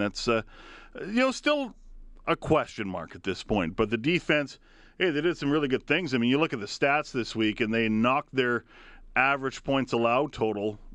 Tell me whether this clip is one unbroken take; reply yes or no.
yes